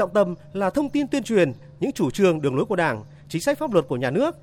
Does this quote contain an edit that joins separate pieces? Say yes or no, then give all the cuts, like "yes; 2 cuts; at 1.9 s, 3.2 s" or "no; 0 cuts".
no; 0 cuts